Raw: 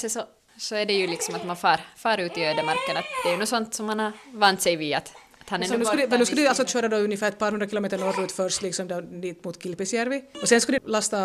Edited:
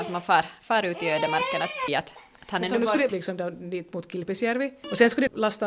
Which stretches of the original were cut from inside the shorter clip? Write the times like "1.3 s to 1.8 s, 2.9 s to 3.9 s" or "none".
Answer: 3.2 s to 4.9 s, 6.1 s to 8.6 s